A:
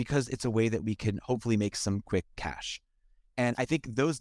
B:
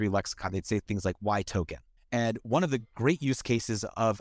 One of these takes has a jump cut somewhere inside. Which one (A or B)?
B